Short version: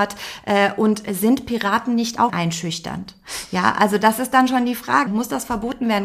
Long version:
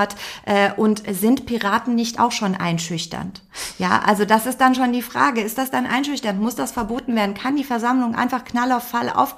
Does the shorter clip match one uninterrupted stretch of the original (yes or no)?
no